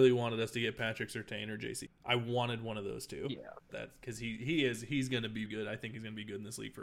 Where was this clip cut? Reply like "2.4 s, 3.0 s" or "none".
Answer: 1.9 s, 3.7 s, 5.5 s